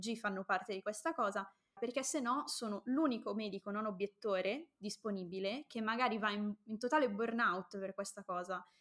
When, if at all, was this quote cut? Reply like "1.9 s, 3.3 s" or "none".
1.8 s

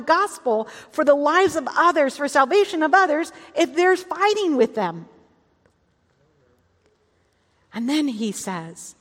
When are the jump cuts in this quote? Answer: none

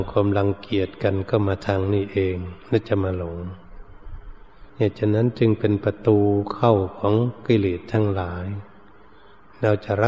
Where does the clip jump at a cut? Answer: 4.7 s

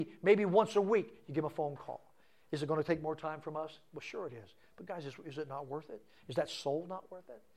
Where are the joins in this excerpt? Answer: none

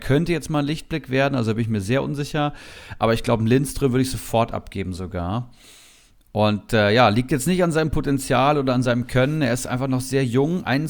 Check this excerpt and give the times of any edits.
none

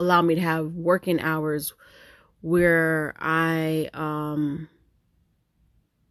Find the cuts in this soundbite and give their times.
none

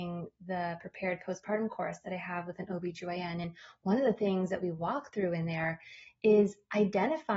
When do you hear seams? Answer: none

